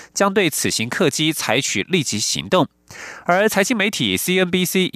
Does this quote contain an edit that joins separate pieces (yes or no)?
no